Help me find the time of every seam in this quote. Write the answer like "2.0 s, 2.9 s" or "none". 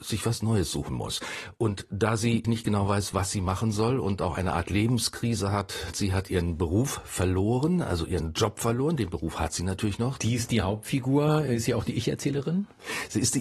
2.4 s, 5.9 s, 10.2 s